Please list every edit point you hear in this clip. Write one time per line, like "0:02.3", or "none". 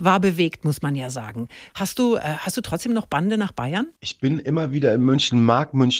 0:01.7
0:04.0